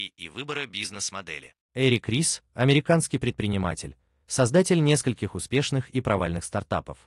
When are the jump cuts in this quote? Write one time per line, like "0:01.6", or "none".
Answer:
0:01.6